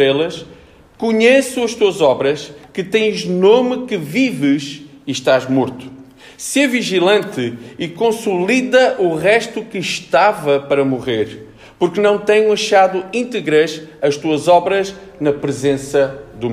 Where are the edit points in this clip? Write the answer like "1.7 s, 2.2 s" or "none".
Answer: none